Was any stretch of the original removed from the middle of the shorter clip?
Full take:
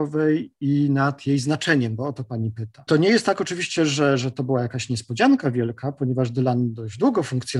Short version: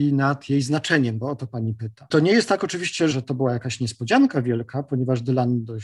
yes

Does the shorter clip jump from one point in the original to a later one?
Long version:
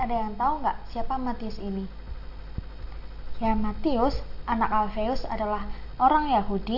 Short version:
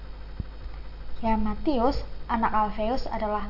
no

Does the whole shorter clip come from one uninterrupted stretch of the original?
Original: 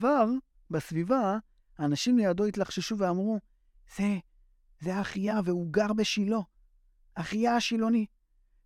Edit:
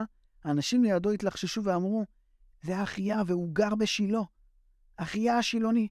no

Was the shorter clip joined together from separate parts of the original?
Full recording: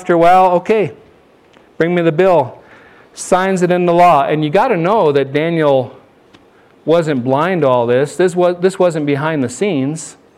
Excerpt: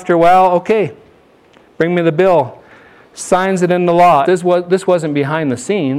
yes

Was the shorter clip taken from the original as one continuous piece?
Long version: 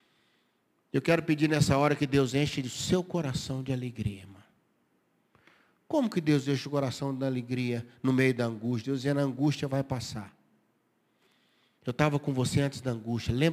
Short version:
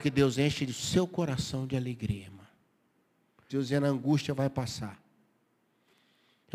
no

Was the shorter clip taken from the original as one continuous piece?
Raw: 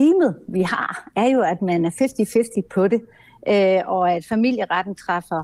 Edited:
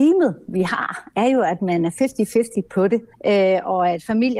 no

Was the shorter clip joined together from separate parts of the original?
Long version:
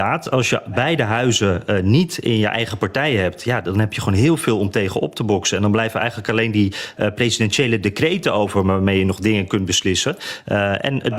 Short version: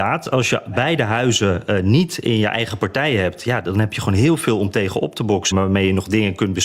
yes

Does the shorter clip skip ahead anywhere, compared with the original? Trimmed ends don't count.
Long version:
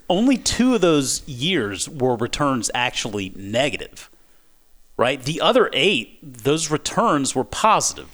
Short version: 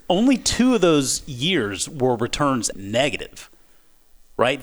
yes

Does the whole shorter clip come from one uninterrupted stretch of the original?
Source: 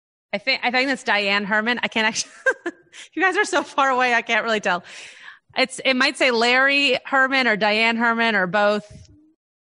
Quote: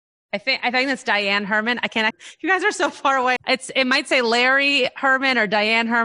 no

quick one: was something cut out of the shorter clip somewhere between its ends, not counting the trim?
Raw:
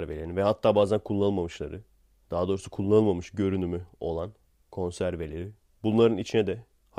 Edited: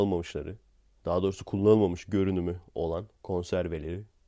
yes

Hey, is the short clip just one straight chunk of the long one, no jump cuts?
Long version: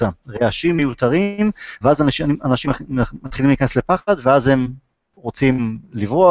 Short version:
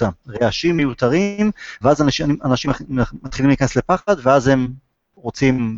yes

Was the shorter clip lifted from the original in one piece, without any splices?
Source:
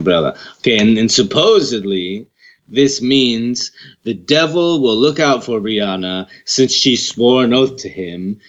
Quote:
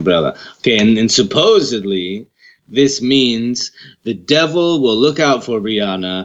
yes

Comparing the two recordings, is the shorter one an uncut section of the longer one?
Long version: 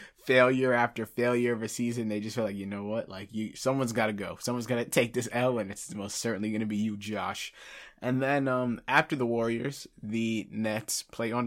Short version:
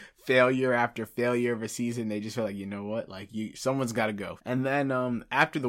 no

